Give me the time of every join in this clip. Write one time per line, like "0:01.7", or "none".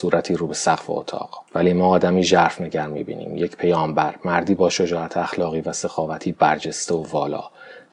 0:01.5